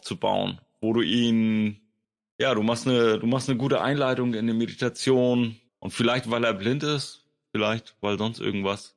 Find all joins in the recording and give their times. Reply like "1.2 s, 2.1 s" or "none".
5.7 s